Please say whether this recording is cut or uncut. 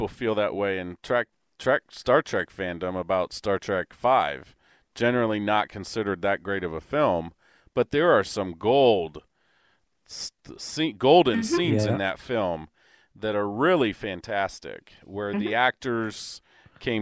uncut